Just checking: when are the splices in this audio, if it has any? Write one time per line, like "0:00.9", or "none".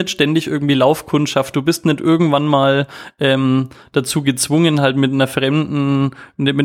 none